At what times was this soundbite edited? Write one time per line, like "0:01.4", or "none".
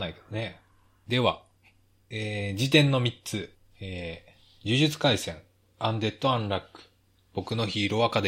none